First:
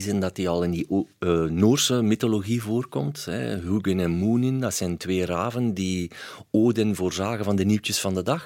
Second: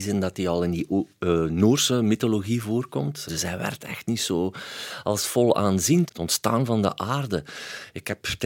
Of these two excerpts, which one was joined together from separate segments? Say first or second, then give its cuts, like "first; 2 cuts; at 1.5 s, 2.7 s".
second; 2 cuts; at 3.3 s, 6.1 s